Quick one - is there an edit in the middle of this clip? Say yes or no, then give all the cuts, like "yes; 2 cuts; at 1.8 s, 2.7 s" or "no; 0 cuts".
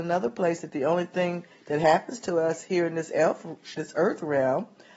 no; 0 cuts